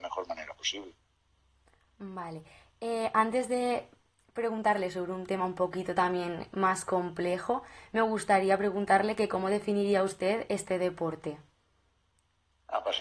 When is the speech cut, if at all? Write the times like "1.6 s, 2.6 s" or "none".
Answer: none

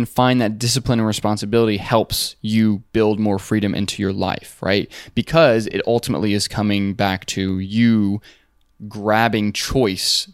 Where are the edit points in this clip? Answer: none

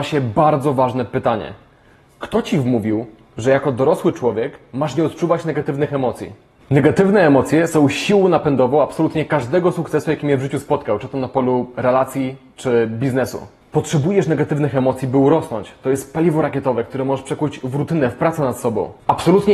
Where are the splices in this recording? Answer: none

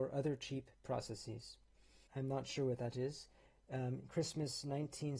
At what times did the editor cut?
2.1 s

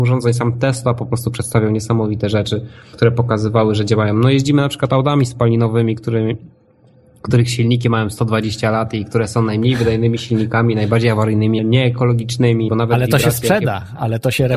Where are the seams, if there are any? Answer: 2.9 s, 11.6 s, 12.7 s

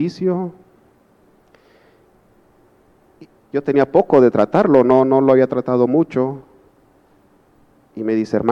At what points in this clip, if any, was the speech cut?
3.3 s

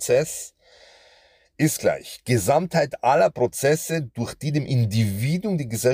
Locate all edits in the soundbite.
none

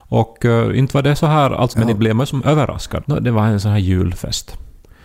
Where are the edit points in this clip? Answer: 1.7 s, 3.0 s

